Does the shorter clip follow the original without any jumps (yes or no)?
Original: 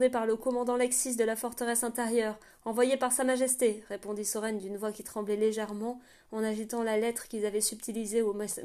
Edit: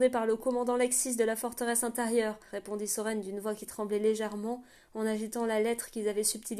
no